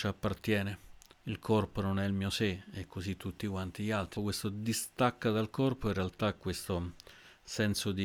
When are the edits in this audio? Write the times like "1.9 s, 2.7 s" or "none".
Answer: 1.1 s, 4.2 s